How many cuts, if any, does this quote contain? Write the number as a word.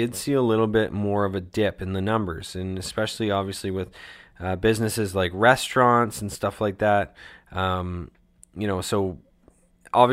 zero